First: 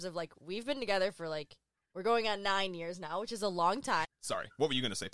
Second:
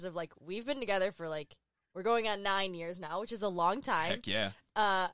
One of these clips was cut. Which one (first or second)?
first